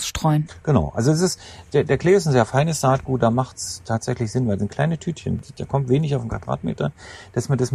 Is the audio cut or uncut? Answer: cut